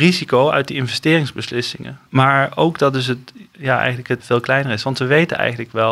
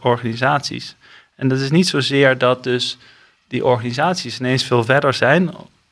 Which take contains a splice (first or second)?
first